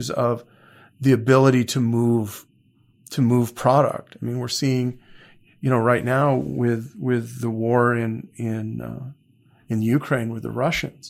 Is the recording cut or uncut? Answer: uncut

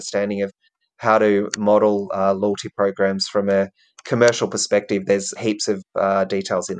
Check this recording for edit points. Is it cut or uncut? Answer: cut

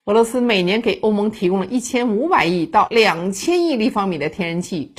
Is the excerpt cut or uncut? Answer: uncut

